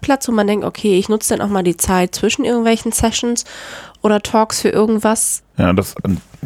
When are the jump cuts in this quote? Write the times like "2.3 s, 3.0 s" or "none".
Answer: 5.4 s